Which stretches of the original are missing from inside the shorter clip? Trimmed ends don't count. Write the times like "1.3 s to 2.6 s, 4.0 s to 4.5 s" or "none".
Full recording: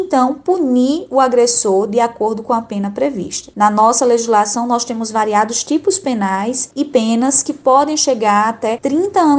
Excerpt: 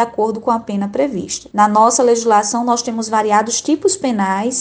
none